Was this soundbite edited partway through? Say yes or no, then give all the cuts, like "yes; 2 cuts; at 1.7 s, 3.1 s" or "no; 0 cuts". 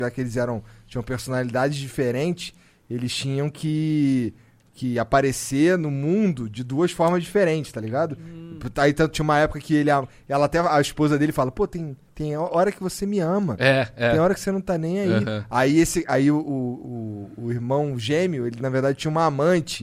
no; 0 cuts